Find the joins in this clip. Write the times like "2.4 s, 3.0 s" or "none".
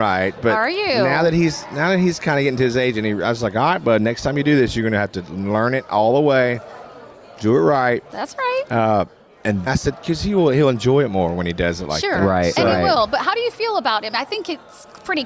9.7 s

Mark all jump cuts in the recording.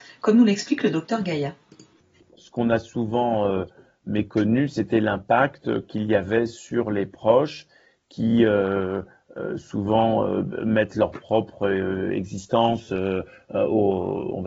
none

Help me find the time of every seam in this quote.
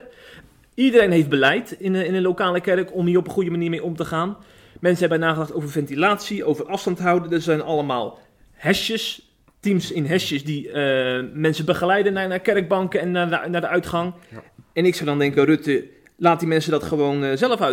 none

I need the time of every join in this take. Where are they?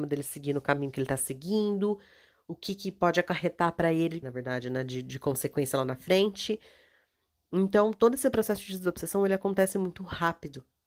4.2 s

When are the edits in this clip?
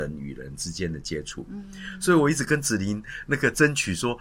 none

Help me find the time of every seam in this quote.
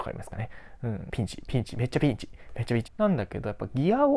1.1 s, 2.9 s

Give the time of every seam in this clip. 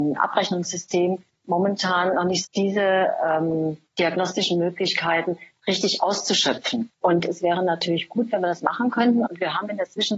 2.4 s, 6.9 s, 9.3 s

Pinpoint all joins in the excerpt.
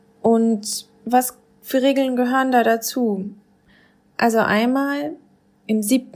none

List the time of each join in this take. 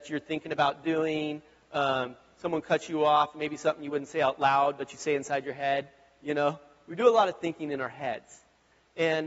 none

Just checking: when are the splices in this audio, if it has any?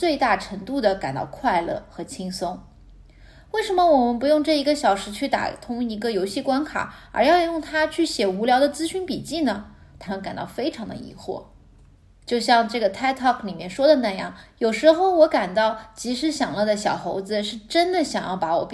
10.1 s

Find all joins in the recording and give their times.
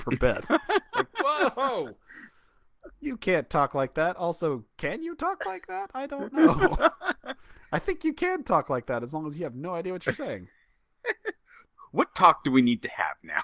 none

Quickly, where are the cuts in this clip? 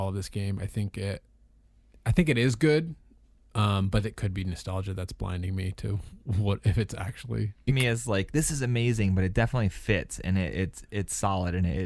7.7 s

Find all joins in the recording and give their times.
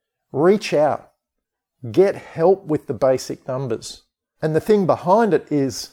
4.4 s

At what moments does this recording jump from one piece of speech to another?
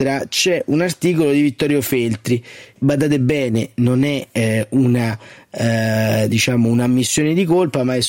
2.8 s

